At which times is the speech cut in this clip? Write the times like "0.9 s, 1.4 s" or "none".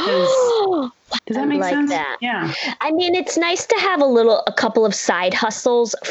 1.2 s